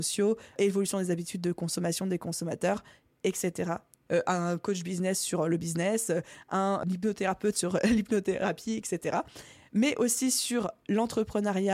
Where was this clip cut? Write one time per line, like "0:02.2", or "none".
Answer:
0:04.1